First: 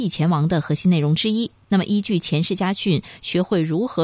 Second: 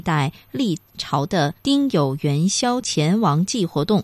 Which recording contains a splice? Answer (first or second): second